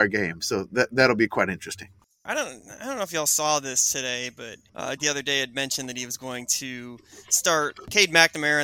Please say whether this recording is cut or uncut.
cut